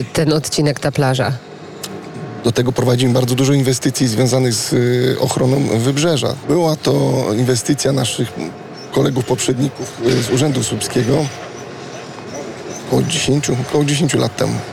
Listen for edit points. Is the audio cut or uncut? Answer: cut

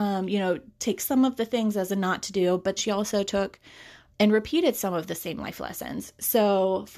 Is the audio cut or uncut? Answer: cut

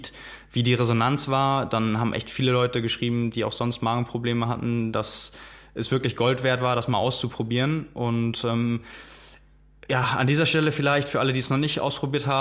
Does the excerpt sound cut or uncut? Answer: uncut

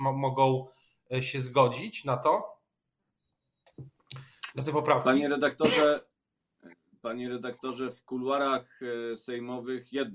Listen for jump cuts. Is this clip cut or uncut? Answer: uncut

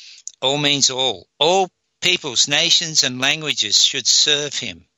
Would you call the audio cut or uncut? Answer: cut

